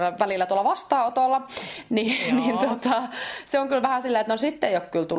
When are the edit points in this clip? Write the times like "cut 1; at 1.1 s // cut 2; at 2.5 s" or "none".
none